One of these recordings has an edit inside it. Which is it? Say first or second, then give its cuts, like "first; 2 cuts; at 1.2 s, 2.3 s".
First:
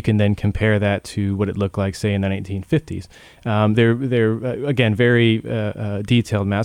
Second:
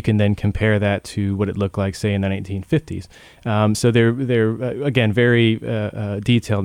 first; 1 cut; at 3.7 s